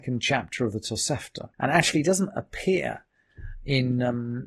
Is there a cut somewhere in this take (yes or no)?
yes